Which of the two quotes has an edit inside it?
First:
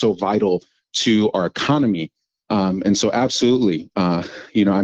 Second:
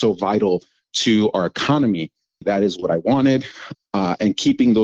second; 2 cuts; at 2.4 s, 3.7 s

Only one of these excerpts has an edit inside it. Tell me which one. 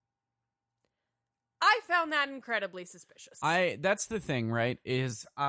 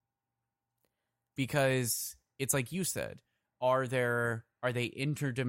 second; 1 cut; at 1.4 s

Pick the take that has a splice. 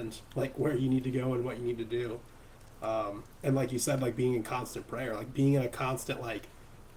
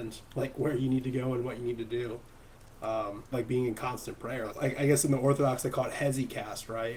second; 2 cuts; at 3.3 s, 4.5 s

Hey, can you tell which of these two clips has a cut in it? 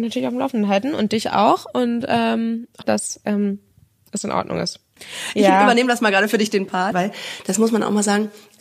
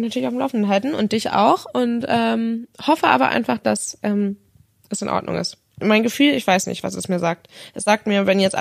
first; 3 cuts; at 2.8 s, 5.0 s, 6.9 s

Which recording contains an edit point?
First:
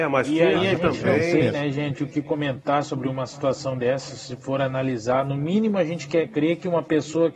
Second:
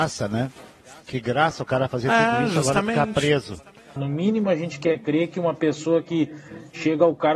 second; 1 cut; at 4.0 s

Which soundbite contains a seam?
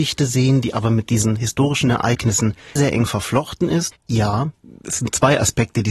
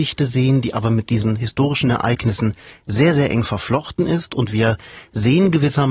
first; 2 cuts; at 2.8 s, 3.9 s

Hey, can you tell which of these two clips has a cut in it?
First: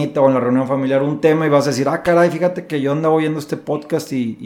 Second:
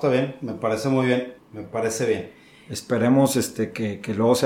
second; 1 cut; at 1.4 s

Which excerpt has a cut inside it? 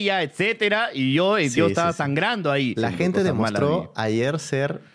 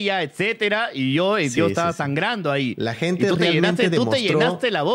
first; 1 cut; at 2.8 s

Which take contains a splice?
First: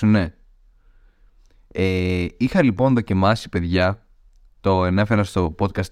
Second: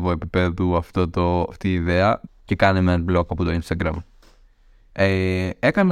second; 1 cut; at 2.3 s

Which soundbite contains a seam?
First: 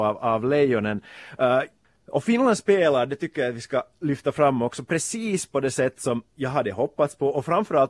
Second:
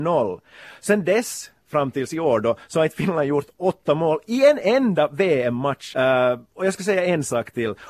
second; 1 cut; at 5.9 s

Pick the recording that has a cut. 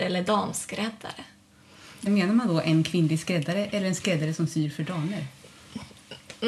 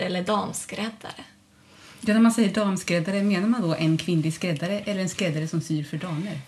first; 1 cut; at 2.1 s

